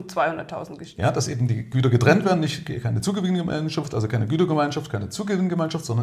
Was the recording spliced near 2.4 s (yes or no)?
no